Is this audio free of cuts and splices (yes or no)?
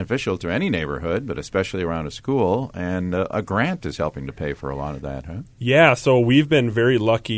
yes